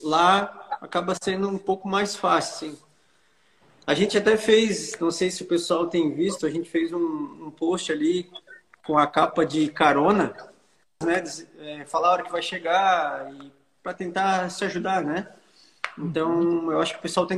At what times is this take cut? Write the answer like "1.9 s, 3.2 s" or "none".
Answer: 11.0 s